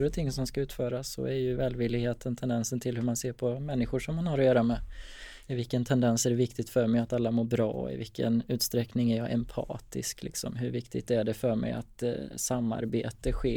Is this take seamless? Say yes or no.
yes